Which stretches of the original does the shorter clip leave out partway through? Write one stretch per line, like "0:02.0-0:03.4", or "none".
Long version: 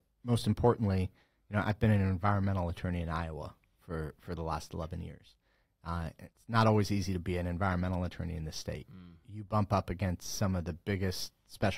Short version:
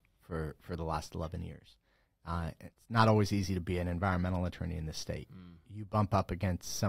none